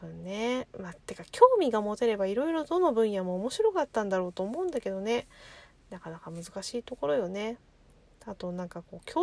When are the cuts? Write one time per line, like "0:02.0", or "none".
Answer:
none